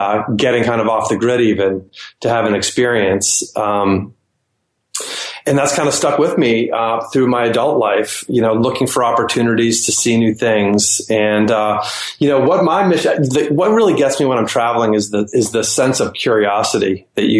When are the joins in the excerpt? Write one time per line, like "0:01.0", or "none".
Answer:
none